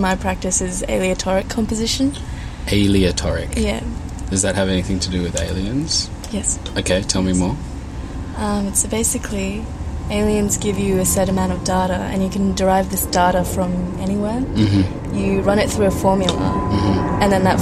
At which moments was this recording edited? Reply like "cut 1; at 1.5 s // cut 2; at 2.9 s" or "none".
none